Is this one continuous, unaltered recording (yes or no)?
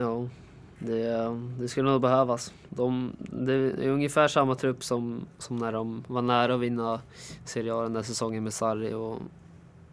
yes